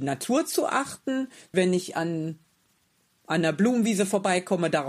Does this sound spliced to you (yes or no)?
yes